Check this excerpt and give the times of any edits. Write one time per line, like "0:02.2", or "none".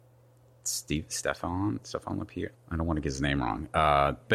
0:02.5